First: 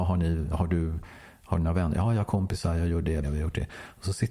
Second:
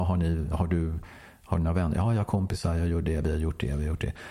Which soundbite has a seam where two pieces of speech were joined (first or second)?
first